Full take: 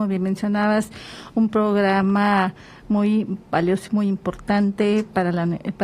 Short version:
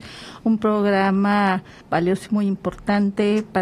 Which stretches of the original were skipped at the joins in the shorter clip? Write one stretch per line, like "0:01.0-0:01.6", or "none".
0:02.7-0:03.4